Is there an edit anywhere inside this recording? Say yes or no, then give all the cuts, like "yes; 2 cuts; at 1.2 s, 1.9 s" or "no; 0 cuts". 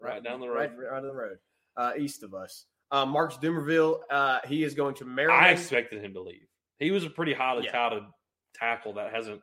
no; 0 cuts